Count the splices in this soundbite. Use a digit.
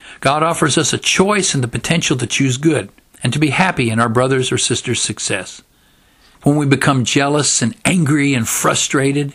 2